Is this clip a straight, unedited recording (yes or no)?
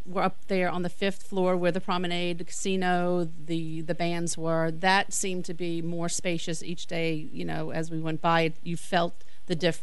yes